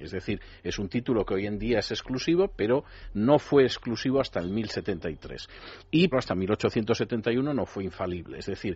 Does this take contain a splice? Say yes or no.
yes